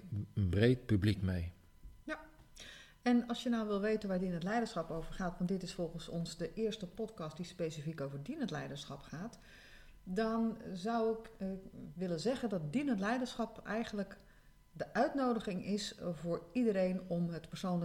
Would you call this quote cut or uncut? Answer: uncut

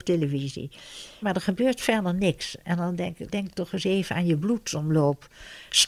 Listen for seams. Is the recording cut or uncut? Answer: cut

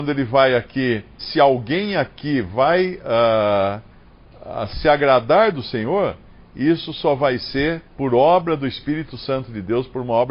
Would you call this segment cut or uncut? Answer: cut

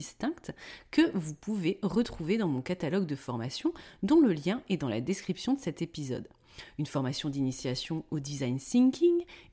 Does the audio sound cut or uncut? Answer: uncut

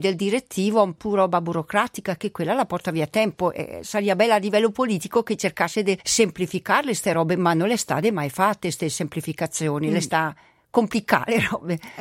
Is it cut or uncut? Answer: uncut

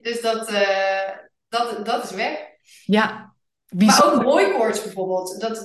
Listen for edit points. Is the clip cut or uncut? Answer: uncut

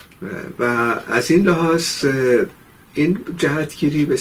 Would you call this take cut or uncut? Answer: uncut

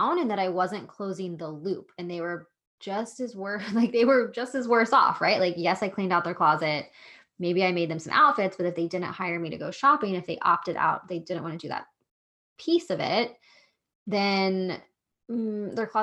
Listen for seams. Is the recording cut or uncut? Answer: uncut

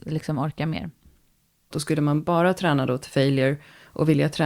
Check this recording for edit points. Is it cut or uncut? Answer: cut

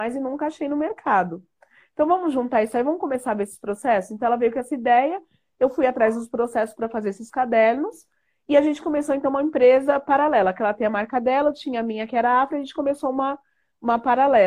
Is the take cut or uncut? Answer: uncut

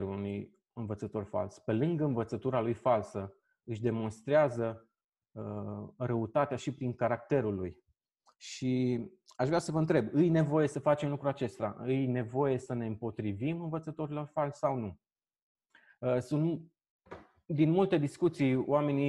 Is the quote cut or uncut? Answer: uncut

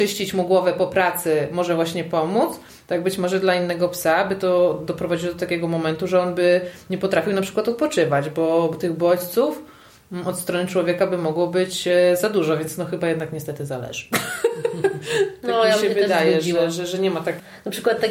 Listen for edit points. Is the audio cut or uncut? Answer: uncut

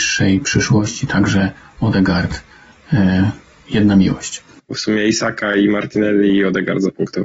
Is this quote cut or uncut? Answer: cut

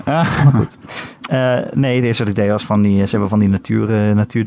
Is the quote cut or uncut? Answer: uncut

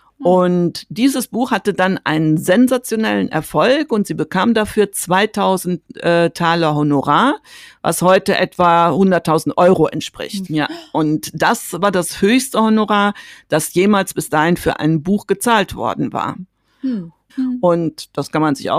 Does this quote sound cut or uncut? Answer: cut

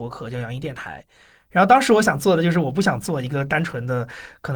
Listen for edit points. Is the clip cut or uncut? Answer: uncut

